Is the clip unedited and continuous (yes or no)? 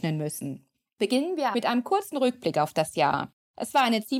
no